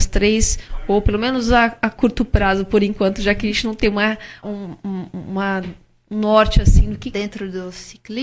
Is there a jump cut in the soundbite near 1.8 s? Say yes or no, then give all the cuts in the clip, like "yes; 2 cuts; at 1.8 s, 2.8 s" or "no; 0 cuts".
no; 2 cuts; at 4.4 s, 7.1 s